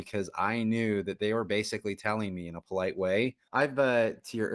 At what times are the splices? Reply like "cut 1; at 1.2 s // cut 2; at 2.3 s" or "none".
cut 1; at 3.5 s